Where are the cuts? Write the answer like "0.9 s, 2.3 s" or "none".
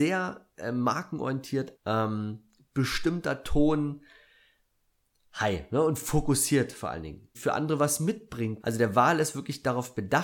1.8 s, 7.3 s, 8.6 s